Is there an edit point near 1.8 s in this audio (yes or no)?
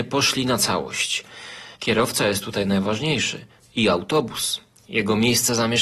yes